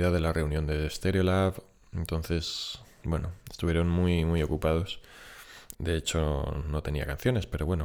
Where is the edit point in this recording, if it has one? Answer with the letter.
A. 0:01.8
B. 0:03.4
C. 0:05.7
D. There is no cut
C